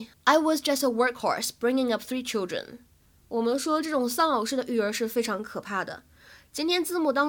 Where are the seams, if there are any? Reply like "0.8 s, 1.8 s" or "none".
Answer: none